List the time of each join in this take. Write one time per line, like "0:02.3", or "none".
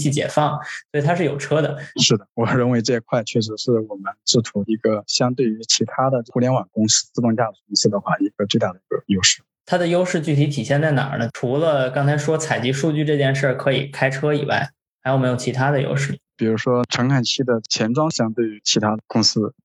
0:01.9